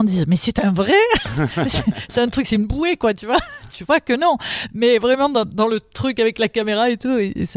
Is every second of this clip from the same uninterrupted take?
yes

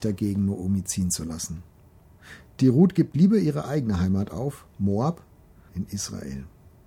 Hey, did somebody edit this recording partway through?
yes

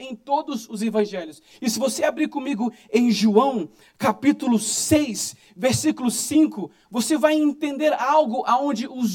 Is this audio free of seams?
yes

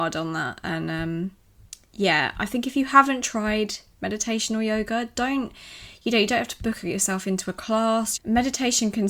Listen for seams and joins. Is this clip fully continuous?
no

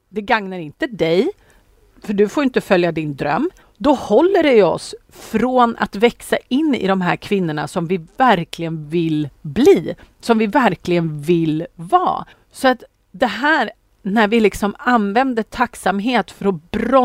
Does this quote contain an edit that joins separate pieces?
yes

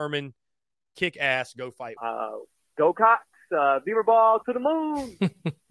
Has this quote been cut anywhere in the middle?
yes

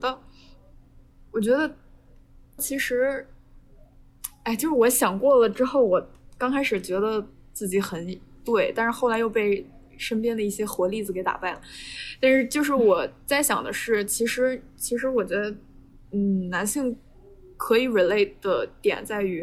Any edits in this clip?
yes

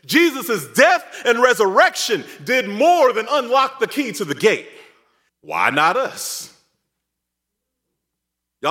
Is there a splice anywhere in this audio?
yes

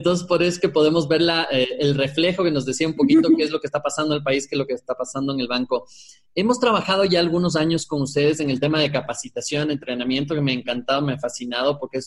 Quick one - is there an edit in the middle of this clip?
no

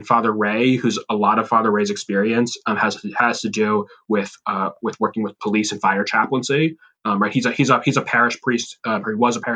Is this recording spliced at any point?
no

